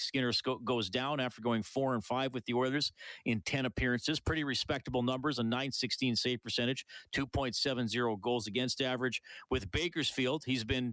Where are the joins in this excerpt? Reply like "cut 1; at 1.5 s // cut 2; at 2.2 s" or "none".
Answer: none